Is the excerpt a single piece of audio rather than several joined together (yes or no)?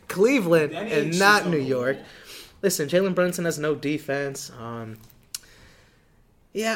yes